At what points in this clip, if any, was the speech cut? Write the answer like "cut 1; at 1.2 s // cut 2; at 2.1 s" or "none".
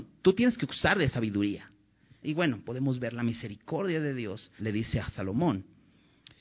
cut 1; at 2.2 s // cut 2; at 4.6 s